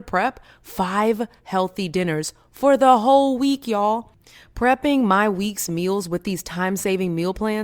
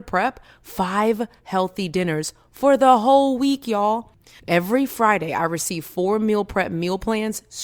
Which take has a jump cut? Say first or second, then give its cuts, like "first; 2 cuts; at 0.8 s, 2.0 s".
second; 1 cut; at 4.4 s